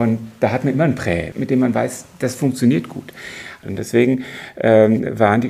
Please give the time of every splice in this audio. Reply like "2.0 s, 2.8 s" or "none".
1.3 s, 3.6 s